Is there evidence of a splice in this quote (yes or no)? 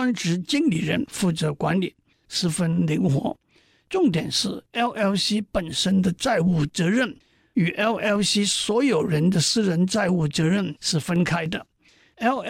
no